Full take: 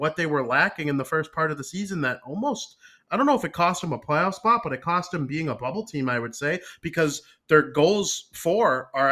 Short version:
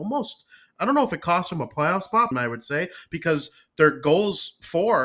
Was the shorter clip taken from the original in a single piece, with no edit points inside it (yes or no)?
no